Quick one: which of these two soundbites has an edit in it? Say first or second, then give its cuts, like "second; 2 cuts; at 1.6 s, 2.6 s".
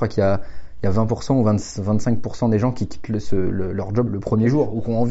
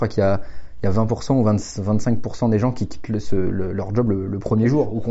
first; 1 cut; at 4.1 s